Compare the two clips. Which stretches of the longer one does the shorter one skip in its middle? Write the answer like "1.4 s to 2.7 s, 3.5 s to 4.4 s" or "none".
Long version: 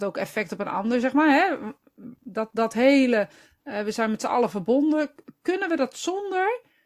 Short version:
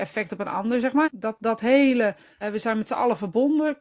1.2 s to 2.2 s, 3.5 s to 3.7 s